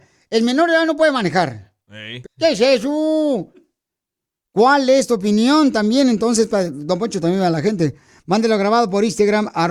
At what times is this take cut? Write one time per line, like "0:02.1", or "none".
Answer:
0:02.2